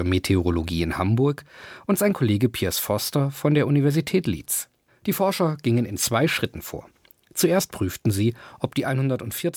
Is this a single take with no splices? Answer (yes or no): no